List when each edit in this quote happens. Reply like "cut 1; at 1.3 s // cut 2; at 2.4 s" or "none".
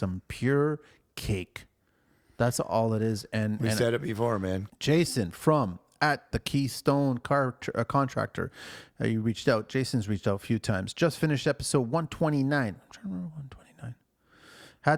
cut 1; at 4.7 s